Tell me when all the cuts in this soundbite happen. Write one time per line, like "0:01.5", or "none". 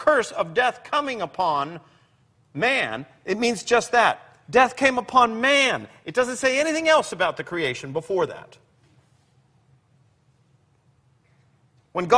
none